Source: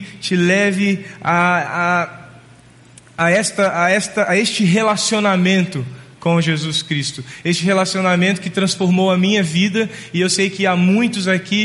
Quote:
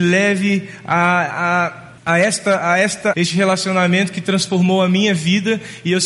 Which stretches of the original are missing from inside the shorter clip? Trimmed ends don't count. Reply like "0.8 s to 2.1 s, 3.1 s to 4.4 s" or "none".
2.3 s to 3.1 s, 4.3 s to 7.4 s